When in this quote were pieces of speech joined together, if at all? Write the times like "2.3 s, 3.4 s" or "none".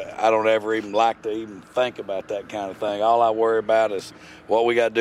none